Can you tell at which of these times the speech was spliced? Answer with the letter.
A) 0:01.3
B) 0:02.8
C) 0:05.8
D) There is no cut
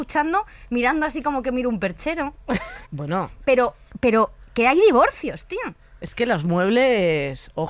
B